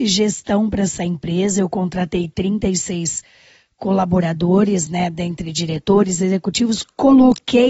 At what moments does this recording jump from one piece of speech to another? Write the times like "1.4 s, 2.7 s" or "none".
none